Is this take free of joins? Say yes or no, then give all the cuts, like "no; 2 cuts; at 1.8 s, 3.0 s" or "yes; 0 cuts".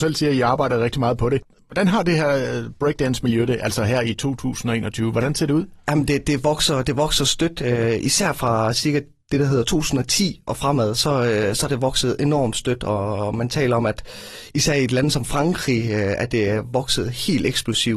yes; 0 cuts